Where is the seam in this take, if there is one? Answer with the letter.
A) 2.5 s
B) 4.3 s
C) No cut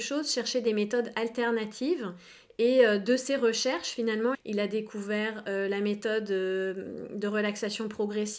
B